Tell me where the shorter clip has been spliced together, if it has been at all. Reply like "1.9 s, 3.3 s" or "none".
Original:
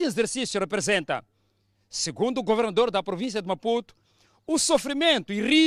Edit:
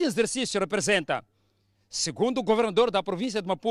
none